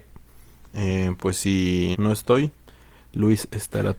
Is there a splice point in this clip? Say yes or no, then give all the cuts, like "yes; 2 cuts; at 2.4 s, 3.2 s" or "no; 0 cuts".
yes; 1 cut; at 1.9 s